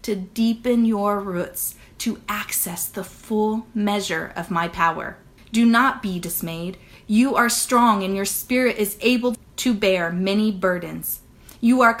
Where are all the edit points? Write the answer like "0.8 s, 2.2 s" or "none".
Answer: 5.4 s

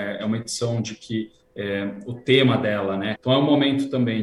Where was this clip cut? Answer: 3.2 s

